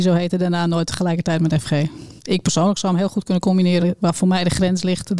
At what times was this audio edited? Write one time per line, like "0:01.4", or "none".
0:02.2
0:03.8